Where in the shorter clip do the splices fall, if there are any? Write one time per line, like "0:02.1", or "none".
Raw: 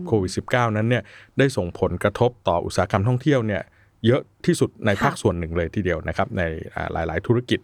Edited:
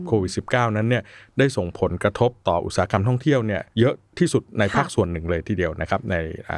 0:03.7